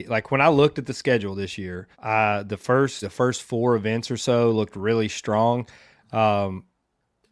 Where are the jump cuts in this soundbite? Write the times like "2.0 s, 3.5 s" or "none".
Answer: 1.9 s, 3.0 s